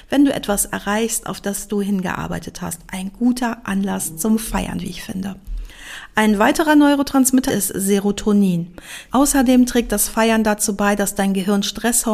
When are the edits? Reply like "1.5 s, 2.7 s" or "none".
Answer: 7.5 s, 9.1 s